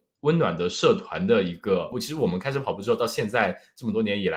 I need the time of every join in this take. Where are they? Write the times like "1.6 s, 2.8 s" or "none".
1.9 s